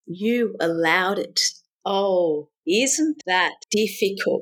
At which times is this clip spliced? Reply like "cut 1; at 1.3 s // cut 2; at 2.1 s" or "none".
cut 1; at 1.8 s